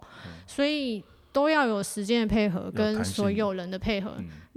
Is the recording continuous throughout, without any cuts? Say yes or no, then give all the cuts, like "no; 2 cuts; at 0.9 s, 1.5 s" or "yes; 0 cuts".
yes; 0 cuts